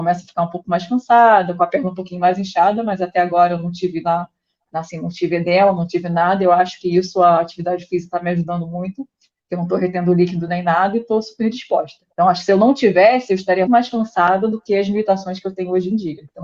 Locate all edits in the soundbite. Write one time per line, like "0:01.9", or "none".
0:12.1
0:13.7